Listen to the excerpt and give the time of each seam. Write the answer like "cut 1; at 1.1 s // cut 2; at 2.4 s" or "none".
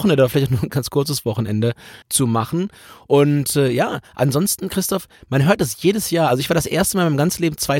cut 1; at 2.0 s